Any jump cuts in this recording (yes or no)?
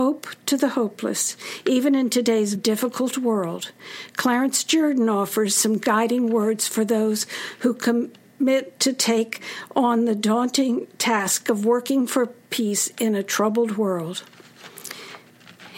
yes